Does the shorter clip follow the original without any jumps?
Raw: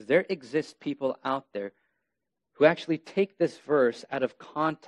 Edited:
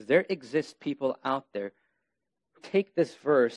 no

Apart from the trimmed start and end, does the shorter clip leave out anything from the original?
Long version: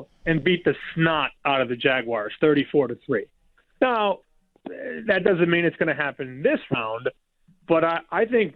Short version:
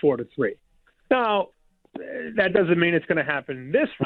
no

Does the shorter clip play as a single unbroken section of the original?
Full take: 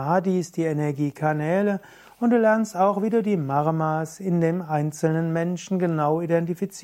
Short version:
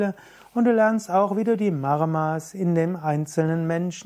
yes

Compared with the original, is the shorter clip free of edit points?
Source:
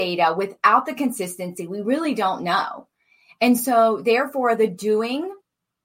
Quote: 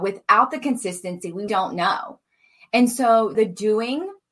no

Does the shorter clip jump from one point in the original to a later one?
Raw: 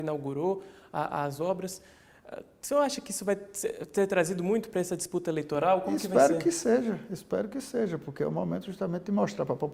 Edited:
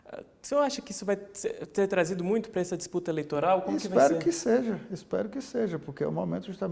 no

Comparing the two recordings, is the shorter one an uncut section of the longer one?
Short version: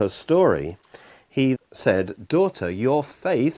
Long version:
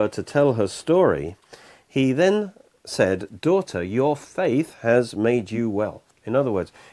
no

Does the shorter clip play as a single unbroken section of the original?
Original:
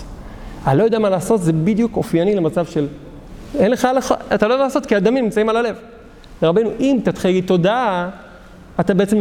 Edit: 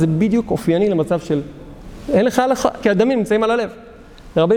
no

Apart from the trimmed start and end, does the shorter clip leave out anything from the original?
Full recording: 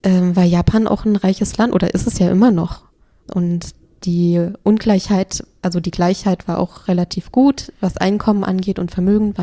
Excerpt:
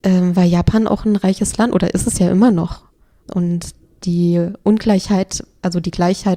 no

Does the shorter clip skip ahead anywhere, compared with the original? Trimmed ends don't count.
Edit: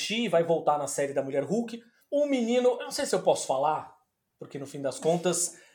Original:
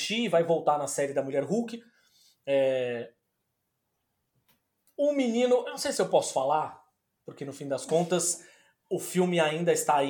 yes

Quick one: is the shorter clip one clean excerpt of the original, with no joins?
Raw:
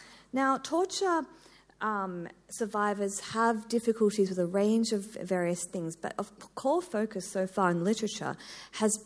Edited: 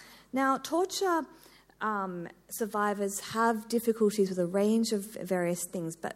yes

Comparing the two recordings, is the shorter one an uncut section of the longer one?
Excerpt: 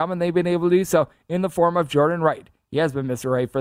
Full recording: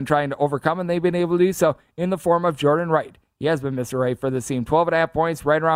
yes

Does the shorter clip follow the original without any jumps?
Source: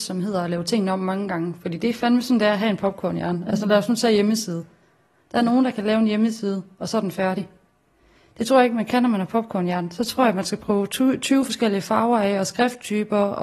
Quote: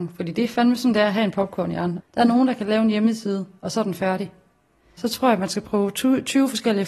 no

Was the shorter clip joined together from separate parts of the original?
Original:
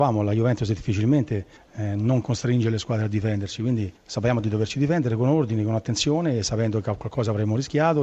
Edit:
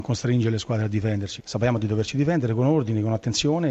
yes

